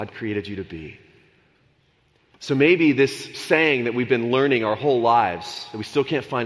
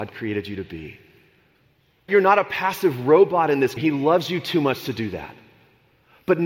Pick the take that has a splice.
second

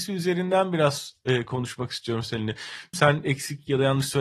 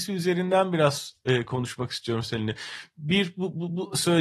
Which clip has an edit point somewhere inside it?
first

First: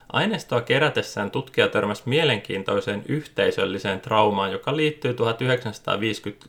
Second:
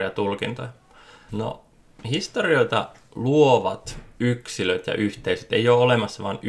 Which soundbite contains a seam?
second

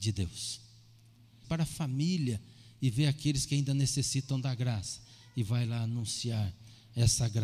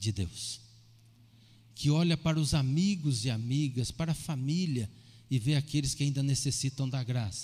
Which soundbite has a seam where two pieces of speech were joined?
first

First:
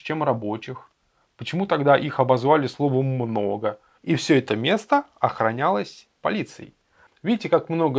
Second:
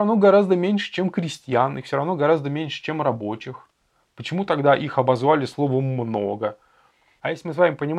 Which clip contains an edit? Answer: first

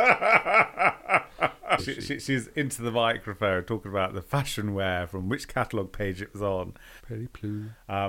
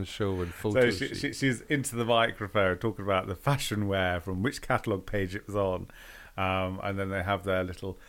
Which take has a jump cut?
first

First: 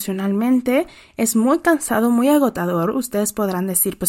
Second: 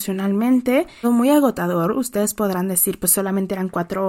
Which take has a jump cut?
second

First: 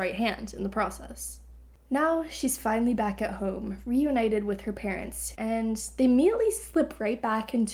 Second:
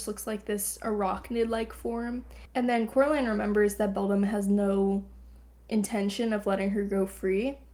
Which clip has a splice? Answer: first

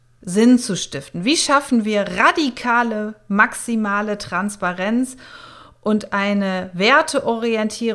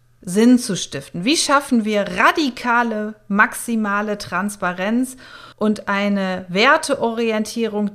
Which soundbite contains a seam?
second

